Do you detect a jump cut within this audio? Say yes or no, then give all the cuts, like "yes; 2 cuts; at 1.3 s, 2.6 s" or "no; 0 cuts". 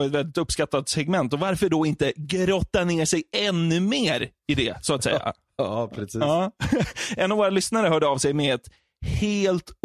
no; 0 cuts